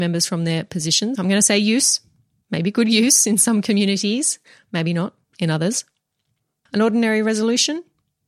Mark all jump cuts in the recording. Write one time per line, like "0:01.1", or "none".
0:01.2
0:06.7